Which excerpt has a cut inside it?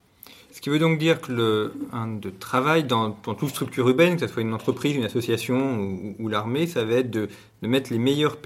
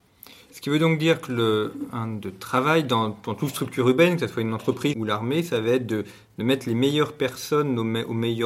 second; 1 cut; at 4.9 s

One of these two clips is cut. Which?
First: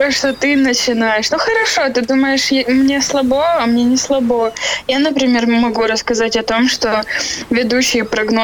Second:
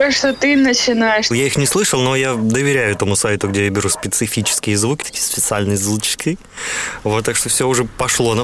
second; 2 cuts; at 1.3 s, 5.0 s

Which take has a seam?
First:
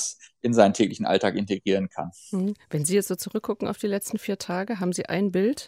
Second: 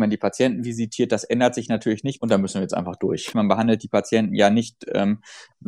second; 2 cuts; at 2.2 s, 3.3 s

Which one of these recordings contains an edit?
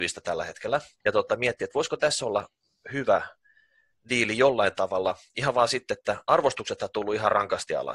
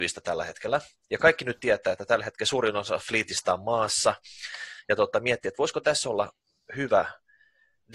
first; 1 cut; at 1.0 s

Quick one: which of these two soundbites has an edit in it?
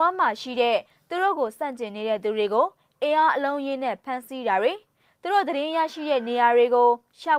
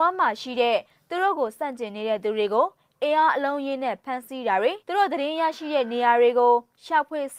second; 1 cut; at 4.8 s

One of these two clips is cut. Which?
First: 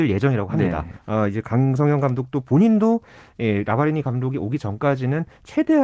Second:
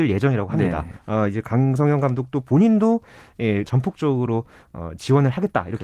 second; 1 cut; at 3.6 s

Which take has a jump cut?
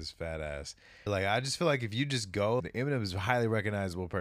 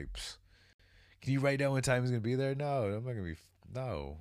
first; 2 cuts; at 1.1 s, 2.6 s

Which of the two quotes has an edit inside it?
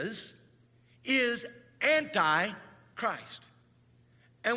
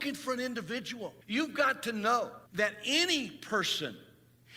second; 2 cuts; at 1.2 s, 2.5 s

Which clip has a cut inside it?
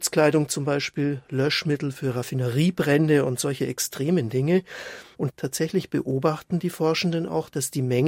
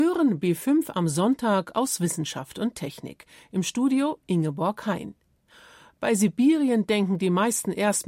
first; 1 cut; at 5.1 s

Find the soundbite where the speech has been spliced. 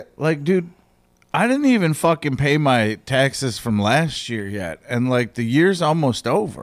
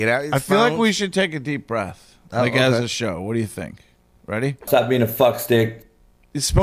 second; 1 cut; at 4.7 s

